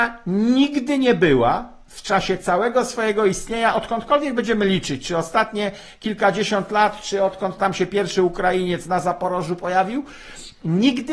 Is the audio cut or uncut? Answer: uncut